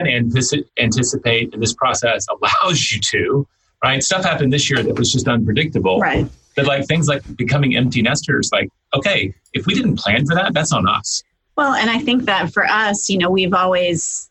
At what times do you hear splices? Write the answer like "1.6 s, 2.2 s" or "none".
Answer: none